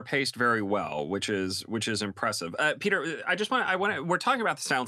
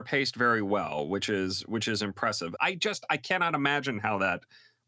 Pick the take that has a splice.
second; 1 cut; at 2.6 s

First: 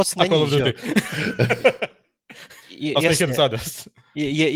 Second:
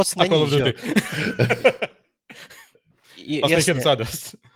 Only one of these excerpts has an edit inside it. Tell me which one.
first; 1 cut; at 2.6 s

